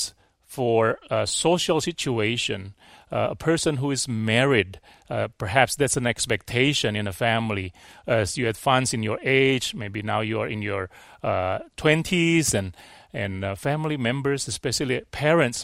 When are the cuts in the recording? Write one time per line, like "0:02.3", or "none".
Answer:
none